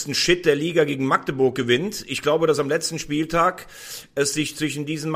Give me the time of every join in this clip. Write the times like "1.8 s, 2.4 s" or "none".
none